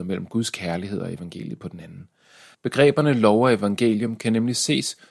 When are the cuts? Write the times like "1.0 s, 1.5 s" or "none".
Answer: 2.5 s